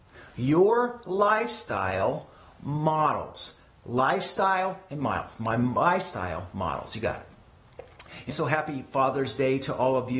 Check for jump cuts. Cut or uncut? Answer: cut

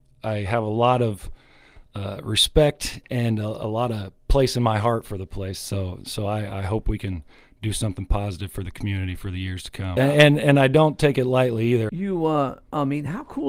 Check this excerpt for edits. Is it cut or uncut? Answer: cut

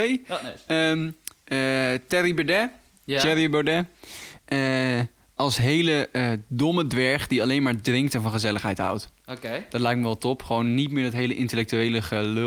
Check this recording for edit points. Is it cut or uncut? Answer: uncut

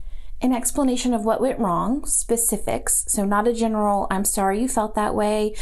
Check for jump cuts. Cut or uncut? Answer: uncut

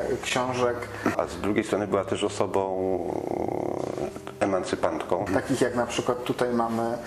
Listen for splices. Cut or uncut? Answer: cut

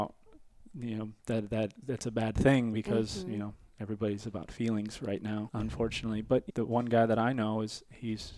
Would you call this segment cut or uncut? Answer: cut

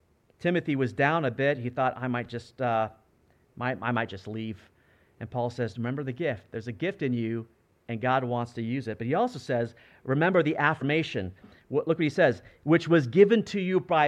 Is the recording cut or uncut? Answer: uncut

